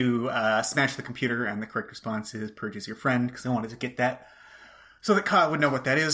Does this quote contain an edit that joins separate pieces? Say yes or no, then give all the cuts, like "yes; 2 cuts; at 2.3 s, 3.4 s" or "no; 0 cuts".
no; 0 cuts